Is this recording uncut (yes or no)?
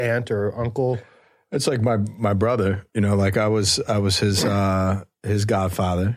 yes